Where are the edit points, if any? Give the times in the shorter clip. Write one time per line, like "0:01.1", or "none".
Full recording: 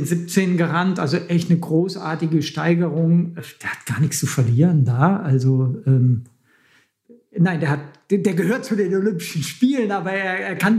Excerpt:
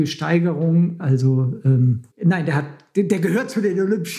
0:01.0
0:02.1